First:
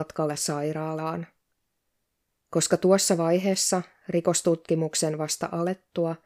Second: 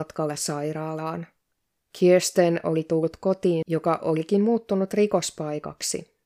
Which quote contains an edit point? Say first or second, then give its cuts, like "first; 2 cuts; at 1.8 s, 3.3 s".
second; 1 cut; at 1.8 s